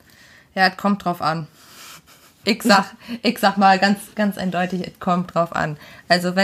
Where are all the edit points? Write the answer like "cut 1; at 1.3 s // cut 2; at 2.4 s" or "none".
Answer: cut 1; at 2.4 s